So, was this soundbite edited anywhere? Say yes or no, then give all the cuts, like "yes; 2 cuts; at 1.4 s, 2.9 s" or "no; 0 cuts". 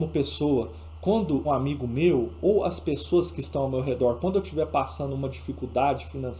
yes; 1 cut; at 1.4 s